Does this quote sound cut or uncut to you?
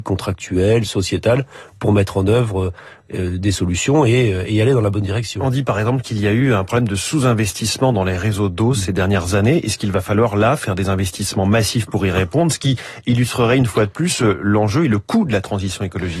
uncut